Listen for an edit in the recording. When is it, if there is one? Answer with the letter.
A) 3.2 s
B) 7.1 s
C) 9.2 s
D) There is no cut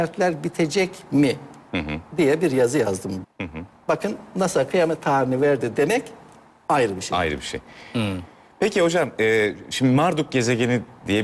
A